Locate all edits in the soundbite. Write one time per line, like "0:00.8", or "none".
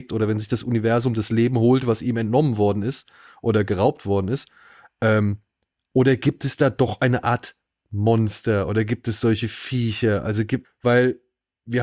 0:10.6